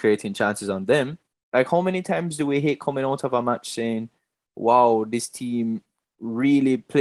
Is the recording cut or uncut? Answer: cut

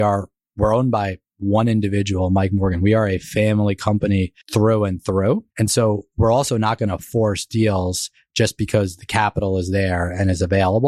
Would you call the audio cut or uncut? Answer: cut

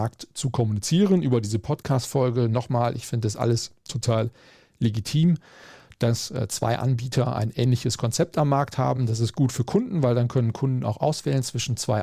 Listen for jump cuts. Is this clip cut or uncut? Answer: uncut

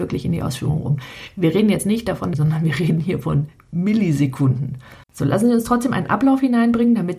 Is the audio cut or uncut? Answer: cut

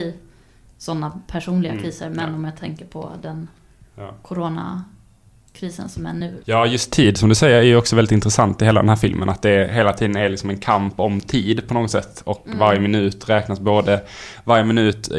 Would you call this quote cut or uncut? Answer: uncut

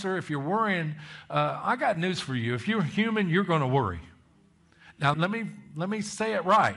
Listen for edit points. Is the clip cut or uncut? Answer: cut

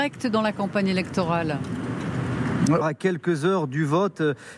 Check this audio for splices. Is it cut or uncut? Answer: cut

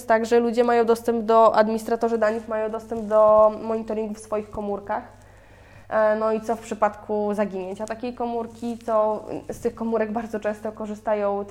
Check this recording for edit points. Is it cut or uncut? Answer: uncut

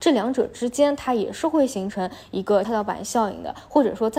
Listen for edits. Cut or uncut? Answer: cut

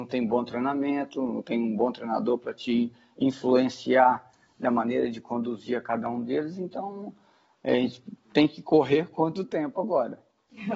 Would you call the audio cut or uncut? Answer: uncut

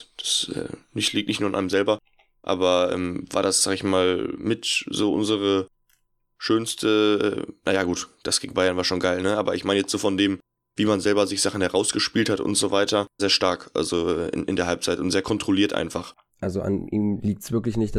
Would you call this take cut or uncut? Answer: cut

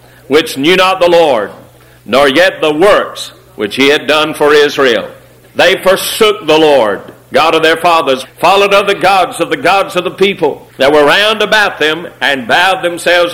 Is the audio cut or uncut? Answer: cut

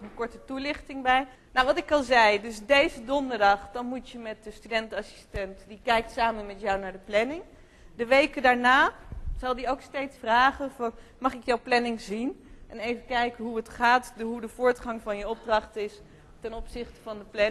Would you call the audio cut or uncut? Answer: cut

